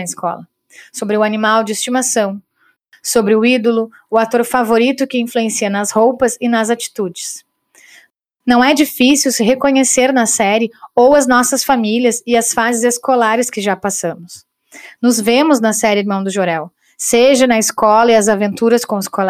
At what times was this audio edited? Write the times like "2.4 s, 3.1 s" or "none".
none